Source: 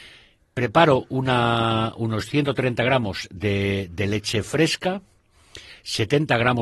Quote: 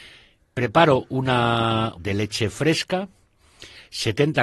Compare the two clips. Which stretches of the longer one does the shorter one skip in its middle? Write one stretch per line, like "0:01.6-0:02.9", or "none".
0:01.9-0:03.9